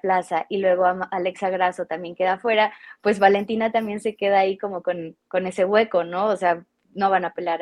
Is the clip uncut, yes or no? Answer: yes